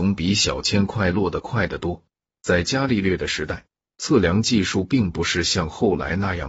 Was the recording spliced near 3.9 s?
no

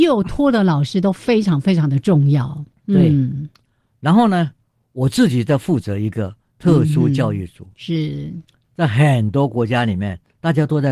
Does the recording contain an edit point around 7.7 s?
no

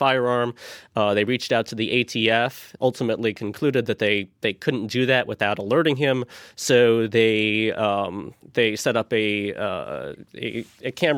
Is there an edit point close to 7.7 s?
no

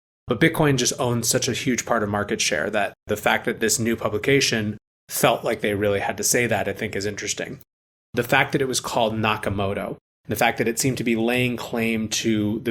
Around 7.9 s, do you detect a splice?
yes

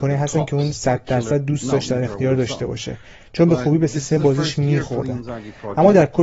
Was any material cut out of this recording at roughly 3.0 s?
no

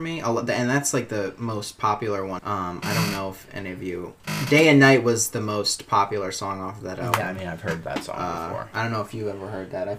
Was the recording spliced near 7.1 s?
no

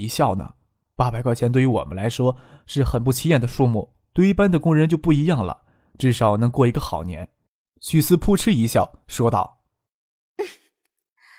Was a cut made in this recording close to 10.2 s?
no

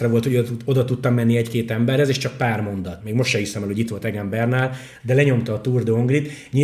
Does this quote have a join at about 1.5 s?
no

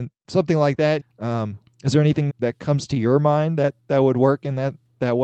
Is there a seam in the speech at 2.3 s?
yes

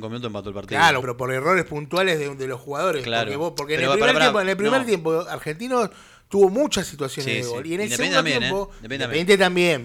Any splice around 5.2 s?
no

